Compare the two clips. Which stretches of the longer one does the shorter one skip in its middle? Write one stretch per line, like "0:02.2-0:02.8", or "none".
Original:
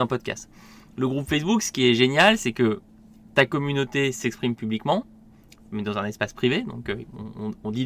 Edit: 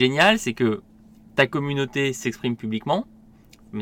none

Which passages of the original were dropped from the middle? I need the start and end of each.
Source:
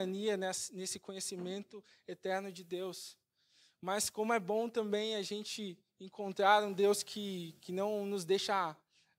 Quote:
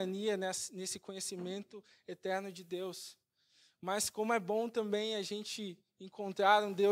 none

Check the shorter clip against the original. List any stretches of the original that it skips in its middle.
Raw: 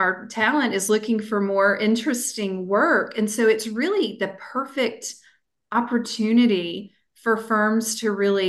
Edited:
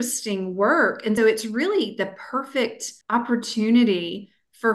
0:03.3-0:03.4
0:05.2-0:05.6

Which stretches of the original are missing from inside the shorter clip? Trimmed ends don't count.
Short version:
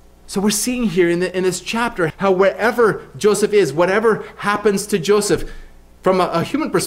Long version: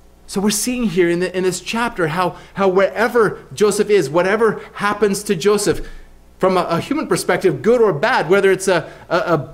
0:02.1-0:02.5

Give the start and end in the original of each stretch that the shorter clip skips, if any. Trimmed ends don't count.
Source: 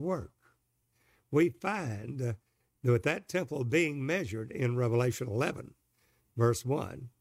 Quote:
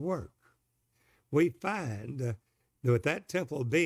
none

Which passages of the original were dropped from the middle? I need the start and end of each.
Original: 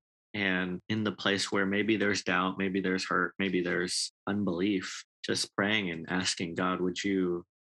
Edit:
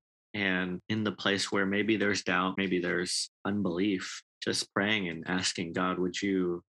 0:02.6-0:03.4

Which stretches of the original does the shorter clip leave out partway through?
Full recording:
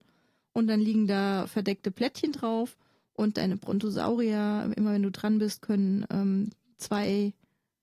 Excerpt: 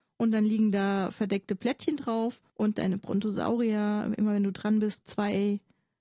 0:02.9-0:03.1
0:05.6-0:06.7

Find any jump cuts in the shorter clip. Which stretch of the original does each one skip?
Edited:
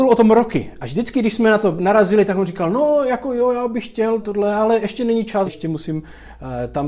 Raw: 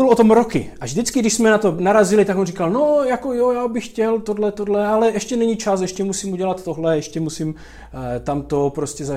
0:04.2-0:04.5
0:05.8-0:07.0

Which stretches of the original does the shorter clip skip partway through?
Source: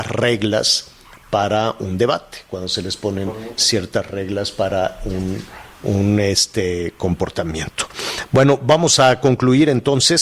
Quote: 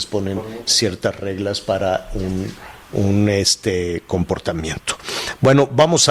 none

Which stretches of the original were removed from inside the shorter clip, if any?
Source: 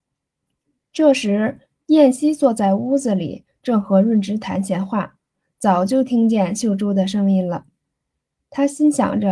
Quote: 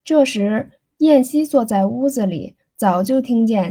0:03.5-0:05.4

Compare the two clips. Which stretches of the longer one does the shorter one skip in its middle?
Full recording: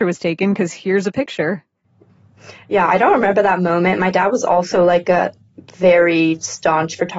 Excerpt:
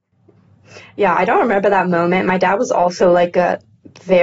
none

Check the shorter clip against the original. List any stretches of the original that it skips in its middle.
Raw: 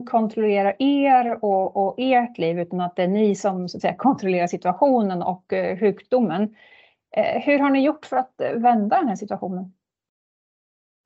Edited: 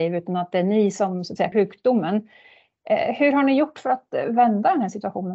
0:04.0-0:05.8

